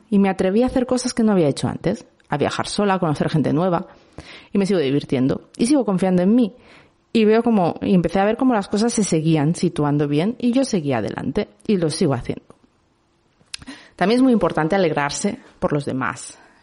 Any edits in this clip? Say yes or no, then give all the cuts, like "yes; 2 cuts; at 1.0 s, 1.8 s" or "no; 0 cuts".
yes; 1 cut; at 7.8 s